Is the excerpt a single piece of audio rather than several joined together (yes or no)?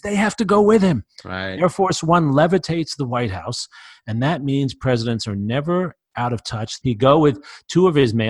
no